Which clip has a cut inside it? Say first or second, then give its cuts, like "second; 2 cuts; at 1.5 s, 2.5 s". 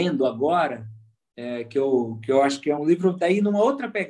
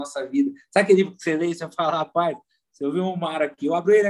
first; 1 cut; at 2.8 s